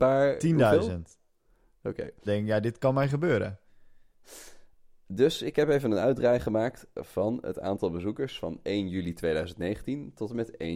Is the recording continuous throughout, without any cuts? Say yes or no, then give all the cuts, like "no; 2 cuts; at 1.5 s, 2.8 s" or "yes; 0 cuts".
no; 1 cut; at 2.3 s